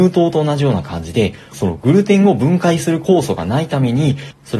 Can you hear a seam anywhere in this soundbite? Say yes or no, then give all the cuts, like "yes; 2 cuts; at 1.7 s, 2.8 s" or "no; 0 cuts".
yes; 1 cut; at 1.5 s